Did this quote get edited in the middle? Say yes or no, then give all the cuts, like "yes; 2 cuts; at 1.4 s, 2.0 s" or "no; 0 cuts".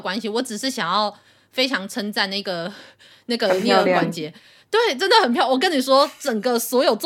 no; 0 cuts